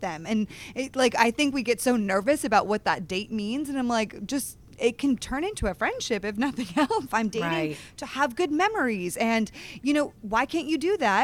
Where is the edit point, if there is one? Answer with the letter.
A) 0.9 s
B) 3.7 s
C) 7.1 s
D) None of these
C